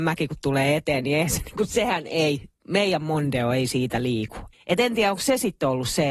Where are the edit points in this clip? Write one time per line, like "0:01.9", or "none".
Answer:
0:04.5